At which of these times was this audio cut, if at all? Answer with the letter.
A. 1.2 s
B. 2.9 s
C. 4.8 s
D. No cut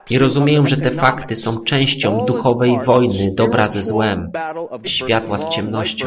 C